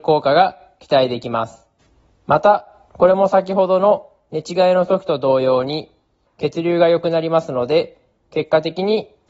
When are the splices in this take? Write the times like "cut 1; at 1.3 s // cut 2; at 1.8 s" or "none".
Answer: cut 1; at 2.1 s // cut 2; at 6.3 s